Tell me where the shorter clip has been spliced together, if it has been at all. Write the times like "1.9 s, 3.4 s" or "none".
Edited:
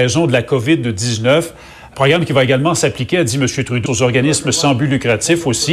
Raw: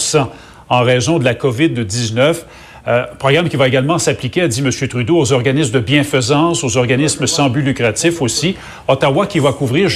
1.9 s, 3.9 s